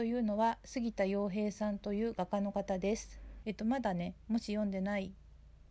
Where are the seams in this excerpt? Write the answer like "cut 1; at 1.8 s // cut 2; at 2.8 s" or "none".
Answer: cut 1; at 3.4 s